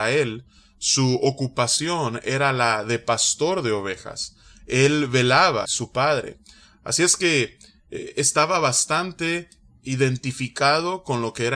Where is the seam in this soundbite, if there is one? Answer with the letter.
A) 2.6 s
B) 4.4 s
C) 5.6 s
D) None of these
C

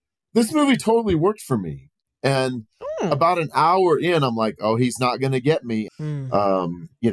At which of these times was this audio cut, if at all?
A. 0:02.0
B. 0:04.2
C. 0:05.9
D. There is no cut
C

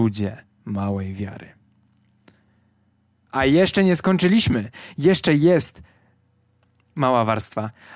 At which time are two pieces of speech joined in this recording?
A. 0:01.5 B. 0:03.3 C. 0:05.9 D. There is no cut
B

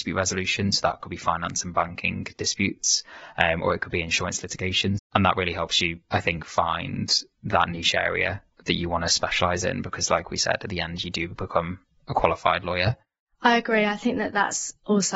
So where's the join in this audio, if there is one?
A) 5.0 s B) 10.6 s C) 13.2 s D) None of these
A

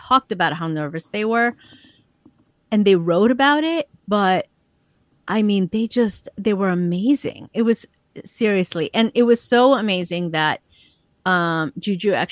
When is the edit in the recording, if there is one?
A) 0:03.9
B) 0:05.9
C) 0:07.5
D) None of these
D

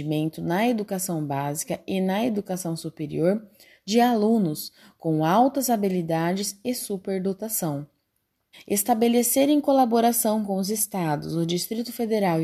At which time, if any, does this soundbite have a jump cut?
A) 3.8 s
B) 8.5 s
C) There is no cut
B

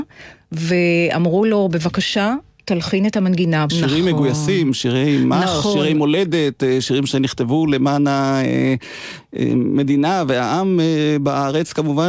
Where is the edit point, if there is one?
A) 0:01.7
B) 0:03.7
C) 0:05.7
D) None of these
B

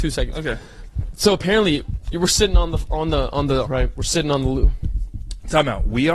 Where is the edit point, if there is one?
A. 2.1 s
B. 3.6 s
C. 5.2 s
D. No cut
B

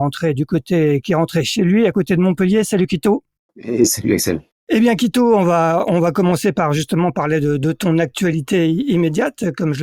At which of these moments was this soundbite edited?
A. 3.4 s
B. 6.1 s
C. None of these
C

